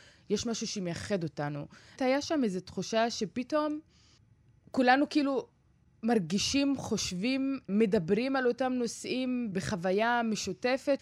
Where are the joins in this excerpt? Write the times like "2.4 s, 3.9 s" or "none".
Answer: 2.0 s